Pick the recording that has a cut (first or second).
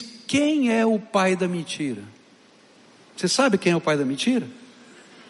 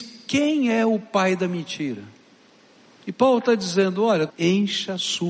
second